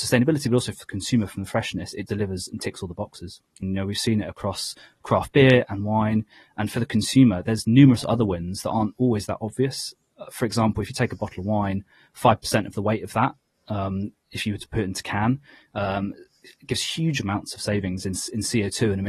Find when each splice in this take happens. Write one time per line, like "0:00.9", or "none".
0:02.1
0:03.6